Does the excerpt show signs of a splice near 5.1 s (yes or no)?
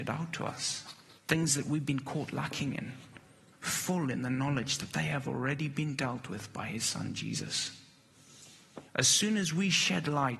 no